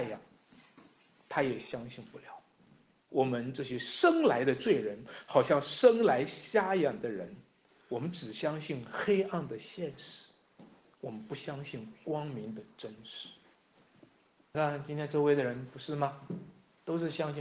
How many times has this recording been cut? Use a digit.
1